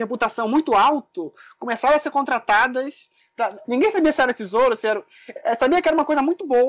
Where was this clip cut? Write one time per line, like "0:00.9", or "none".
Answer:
0:03.6